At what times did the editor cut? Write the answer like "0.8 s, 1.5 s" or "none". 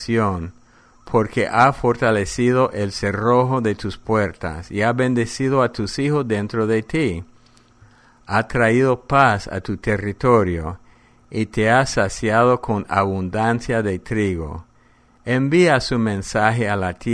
none